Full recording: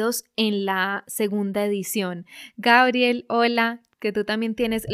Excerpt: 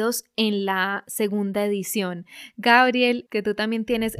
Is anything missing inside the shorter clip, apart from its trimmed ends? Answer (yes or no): yes